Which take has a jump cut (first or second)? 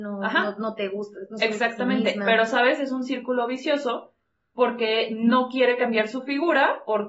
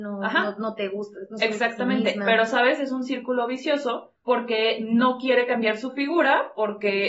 second